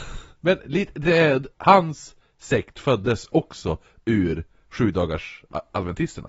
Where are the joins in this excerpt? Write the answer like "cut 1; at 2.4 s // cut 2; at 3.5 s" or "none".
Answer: cut 1; at 1.5 s